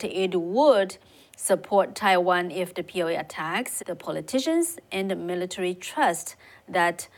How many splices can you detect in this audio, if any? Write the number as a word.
one